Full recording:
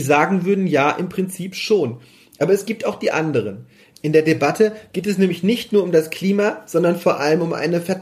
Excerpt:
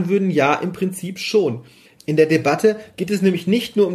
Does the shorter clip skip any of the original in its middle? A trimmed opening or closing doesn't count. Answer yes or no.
yes